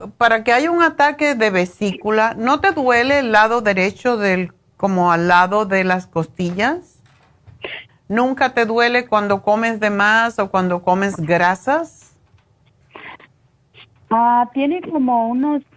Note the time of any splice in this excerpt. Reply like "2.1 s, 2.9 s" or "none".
7.9 s